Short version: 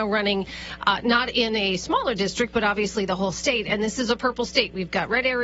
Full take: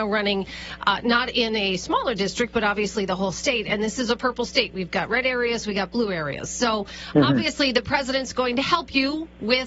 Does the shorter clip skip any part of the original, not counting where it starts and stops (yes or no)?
no